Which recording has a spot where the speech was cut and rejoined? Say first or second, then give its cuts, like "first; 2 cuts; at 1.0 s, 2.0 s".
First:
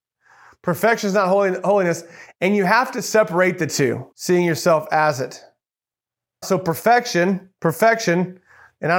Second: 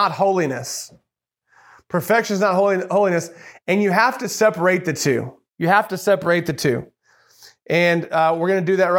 first; 2 cuts; at 4.1 s, 6.4 s